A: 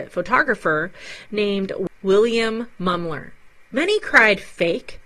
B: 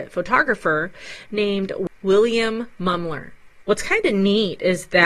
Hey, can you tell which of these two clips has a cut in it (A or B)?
B